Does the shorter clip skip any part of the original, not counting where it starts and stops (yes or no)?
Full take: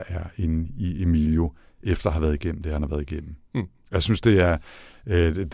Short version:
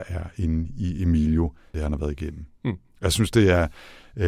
yes